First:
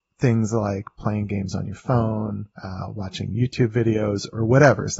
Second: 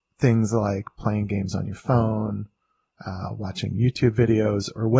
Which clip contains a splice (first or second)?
first